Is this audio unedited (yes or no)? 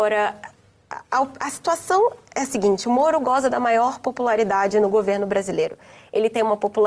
yes